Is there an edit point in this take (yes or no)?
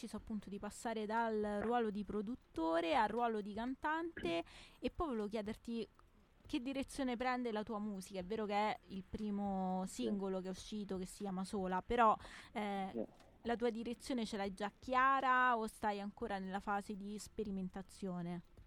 no